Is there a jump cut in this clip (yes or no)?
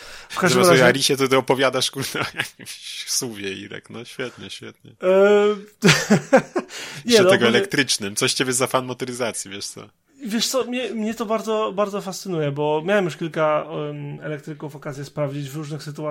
no